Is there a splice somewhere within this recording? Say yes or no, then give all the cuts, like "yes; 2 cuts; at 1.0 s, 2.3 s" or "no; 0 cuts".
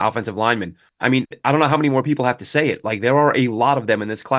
no; 0 cuts